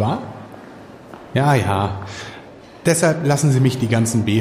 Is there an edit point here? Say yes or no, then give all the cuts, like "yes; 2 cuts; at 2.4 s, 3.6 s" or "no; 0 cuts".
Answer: no; 0 cuts